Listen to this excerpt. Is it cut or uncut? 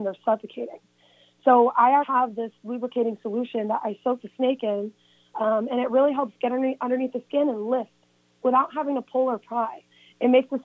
cut